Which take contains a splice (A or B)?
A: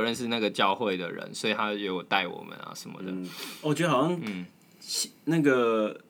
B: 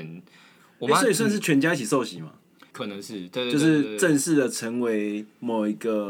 B